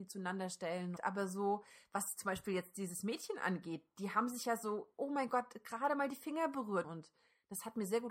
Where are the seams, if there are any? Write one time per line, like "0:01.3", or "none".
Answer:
0:01.0
0:06.8